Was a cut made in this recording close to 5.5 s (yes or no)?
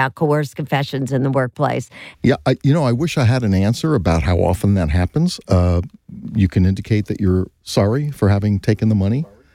yes